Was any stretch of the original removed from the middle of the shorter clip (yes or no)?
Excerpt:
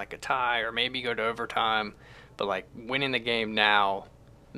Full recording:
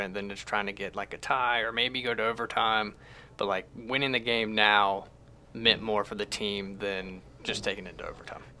no